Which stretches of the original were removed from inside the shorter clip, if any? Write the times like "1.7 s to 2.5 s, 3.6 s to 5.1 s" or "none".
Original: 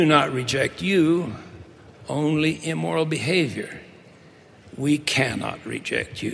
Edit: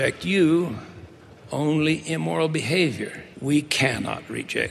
3.9 s to 4.7 s